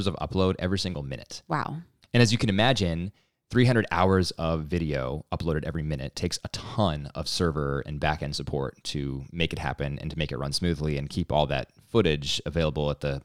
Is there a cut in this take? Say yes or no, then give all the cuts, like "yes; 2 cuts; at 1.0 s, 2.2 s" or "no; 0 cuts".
no; 0 cuts